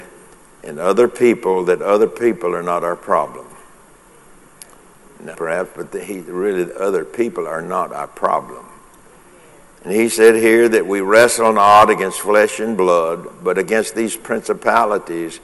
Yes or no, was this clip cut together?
yes